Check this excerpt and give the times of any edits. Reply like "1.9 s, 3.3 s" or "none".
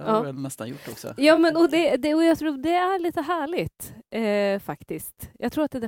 none

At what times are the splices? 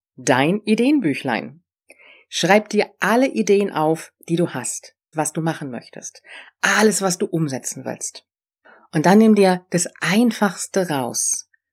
5.1 s

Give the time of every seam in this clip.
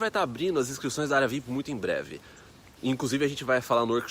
none

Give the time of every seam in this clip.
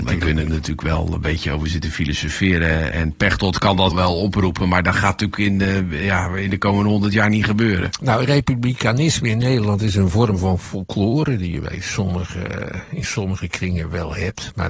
3.9 s

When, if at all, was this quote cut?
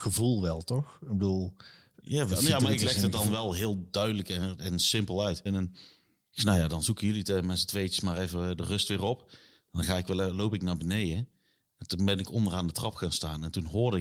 5.5 s

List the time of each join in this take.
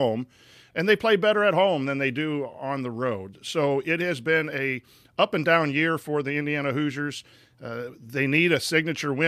none

